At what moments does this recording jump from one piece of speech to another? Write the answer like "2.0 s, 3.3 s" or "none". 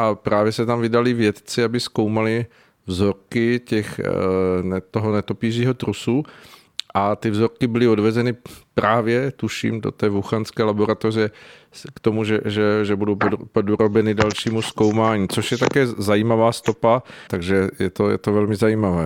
17.3 s